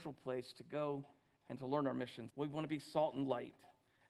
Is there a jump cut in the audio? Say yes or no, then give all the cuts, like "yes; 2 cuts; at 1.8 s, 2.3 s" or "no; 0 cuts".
yes; 1 cut; at 2.3 s